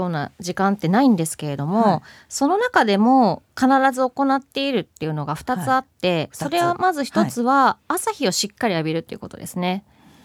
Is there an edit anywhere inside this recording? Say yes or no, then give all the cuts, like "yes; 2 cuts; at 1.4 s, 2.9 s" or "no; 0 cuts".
no; 0 cuts